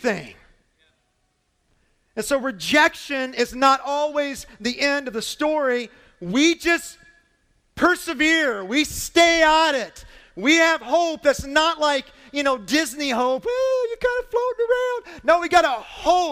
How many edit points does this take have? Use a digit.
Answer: 0